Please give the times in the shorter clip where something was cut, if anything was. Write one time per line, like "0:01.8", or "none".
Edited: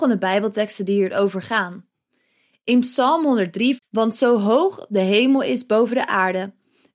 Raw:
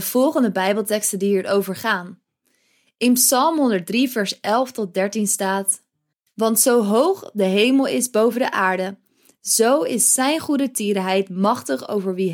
0:03.8

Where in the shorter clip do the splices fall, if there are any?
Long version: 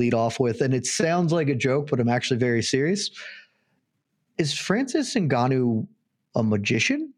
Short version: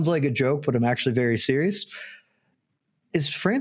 none

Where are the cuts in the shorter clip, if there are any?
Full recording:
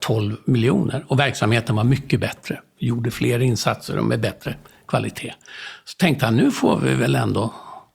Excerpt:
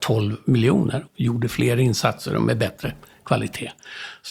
0:01.1

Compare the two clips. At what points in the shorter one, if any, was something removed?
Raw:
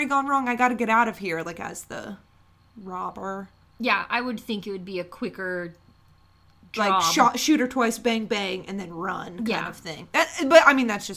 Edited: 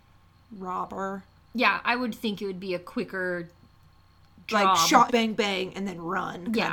0:05.1

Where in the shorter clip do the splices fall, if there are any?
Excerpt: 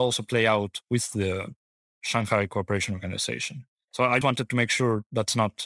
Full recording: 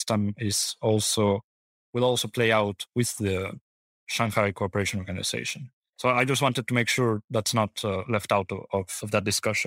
0:04.2

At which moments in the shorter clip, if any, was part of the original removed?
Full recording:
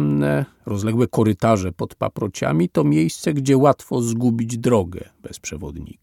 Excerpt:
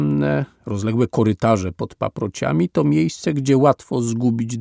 none

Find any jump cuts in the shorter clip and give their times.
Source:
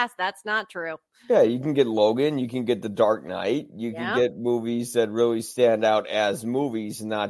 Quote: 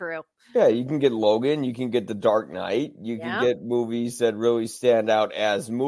none

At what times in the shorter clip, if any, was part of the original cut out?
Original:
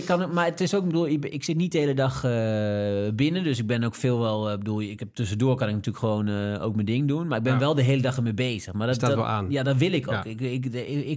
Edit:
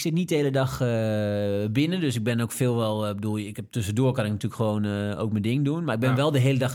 none

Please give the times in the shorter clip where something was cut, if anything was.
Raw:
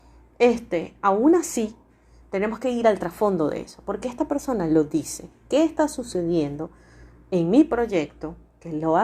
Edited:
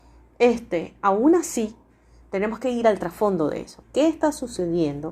0:03.8

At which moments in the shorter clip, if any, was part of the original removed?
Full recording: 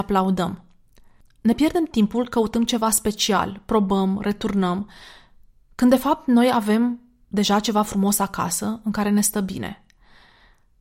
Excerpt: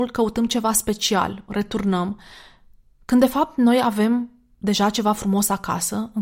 0:01.5

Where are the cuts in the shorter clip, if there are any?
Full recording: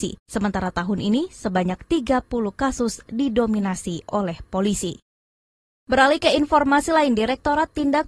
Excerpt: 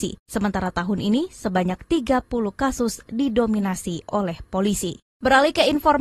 0:05.1

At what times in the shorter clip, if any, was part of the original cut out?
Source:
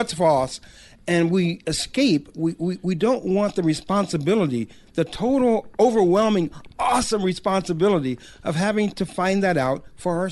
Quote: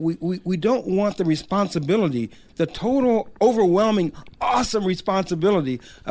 none

